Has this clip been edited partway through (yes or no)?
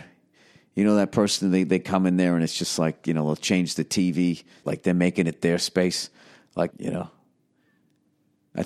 yes